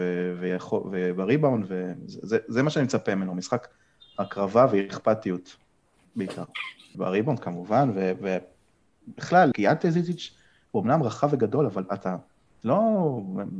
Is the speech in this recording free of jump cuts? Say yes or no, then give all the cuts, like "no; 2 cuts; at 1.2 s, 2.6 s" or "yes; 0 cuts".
no; 2 cuts; at 6.9 s, 9.5 s